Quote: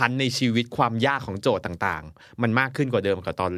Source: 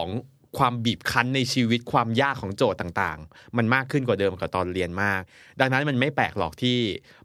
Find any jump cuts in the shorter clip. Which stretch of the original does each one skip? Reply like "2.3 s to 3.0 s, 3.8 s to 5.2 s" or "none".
none